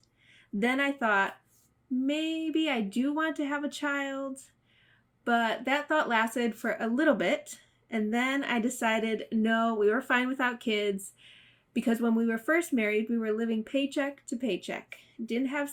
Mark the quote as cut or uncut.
uncut